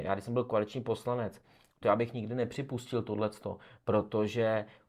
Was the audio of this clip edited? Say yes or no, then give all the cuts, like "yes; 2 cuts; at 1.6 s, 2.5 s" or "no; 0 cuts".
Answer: no; 0 cuts